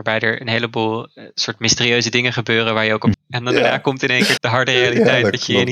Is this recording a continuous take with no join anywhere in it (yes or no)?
no